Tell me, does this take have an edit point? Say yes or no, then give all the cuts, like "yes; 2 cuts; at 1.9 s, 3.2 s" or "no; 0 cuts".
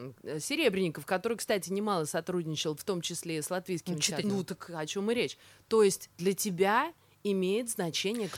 yes; 1 cut; at 4.2 s